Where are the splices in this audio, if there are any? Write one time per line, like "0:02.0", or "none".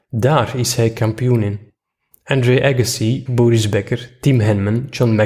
0:03.3